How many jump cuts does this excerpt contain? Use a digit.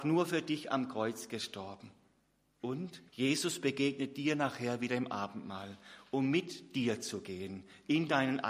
1